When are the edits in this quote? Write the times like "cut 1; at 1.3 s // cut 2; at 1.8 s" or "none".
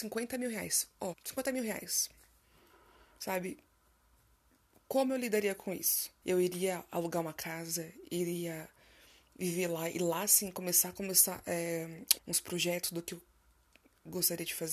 cut 1; at 1.1 s // cut 2; at 6.2 s // cut 3; at 12.2 s